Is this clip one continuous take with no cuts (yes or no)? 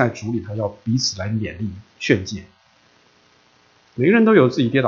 yes